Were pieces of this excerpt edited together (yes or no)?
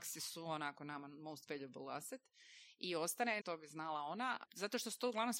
yes